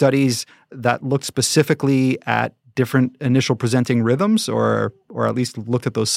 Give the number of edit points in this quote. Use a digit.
0